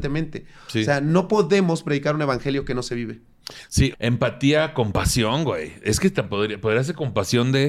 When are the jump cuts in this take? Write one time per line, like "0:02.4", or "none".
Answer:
0:03.9